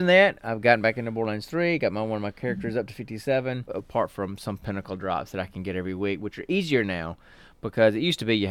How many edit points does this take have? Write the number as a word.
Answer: one